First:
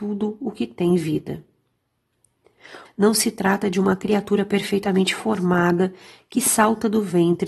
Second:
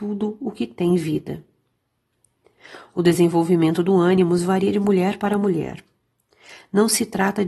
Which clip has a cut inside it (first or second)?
first